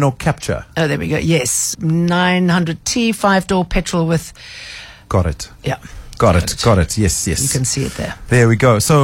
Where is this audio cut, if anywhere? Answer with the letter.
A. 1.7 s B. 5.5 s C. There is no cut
A